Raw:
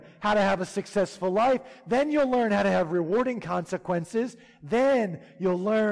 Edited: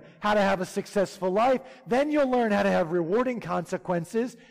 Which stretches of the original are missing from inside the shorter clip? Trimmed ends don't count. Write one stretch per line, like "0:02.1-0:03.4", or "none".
none